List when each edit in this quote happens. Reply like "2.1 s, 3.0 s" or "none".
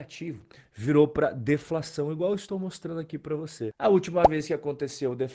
none

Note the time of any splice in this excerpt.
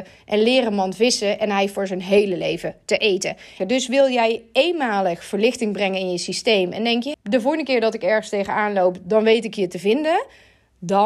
3.6 s, 7.1 s

